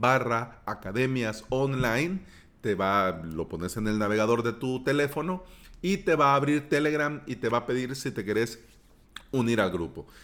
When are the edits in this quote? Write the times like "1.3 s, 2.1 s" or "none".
none